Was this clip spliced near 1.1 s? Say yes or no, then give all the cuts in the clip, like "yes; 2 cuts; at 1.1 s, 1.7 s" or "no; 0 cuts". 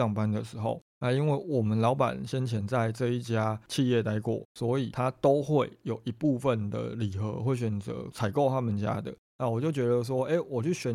no; 1 cut; at 9.2 s